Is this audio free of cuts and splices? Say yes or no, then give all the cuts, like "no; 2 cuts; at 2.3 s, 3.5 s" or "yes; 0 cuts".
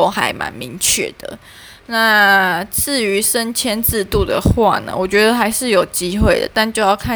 yes; 0 cuts